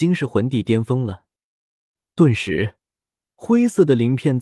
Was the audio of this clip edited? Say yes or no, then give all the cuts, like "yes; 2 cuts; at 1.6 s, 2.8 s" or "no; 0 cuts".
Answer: no; 0 cuts